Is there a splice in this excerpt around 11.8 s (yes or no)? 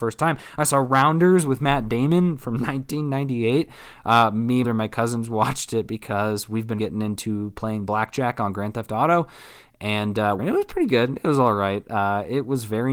no